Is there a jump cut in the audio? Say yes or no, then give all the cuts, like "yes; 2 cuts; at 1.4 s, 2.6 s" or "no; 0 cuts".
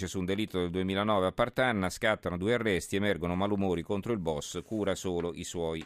no; 0 cuts